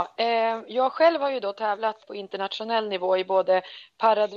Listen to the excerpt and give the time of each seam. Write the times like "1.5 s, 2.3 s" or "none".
2.0 s